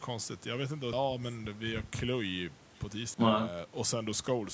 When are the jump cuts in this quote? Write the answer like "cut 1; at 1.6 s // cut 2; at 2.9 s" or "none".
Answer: cut 1; at 0.9 s // cut 2; at 3.1 s

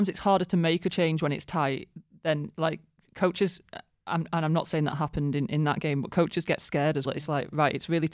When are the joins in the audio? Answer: cut 1; at 7.0 s

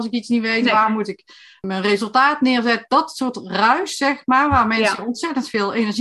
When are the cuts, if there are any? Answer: cut 1; at 1.6 s

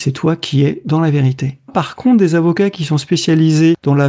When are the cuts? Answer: cut 1; at 1.7 s

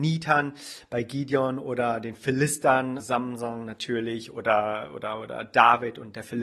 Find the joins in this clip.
cut 1; at 3.0 s

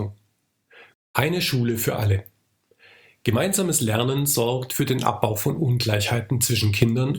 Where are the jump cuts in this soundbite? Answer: cut 1; at 0.9 s

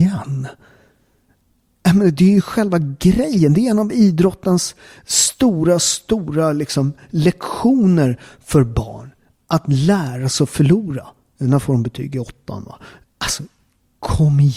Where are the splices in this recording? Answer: cut 1; at 11.4 s // cut 2; at 13.0 s

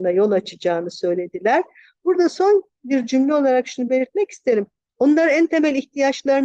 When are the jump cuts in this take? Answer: cut 1; at 4.9 s

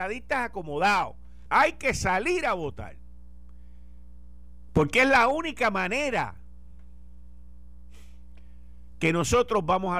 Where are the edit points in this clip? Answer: cut 1; at 1.5 s // cut 2; at 4.7 s

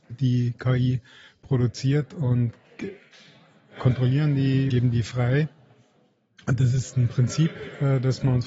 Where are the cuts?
cut 1; at 4.7 s

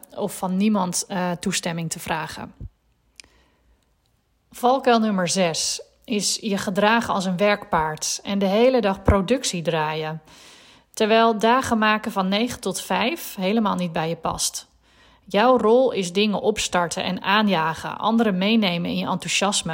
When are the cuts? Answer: none

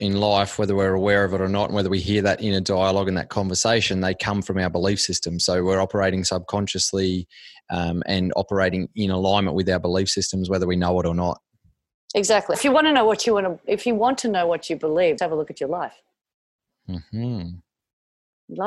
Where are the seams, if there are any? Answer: cut 1; at 12.5 s // cut 2; at 15.2 s

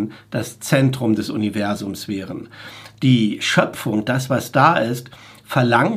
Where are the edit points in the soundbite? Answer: none

